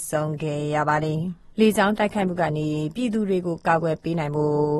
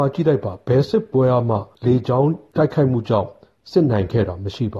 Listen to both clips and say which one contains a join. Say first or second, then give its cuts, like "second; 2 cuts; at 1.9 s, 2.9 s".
first; 1 cut; at 1.5 s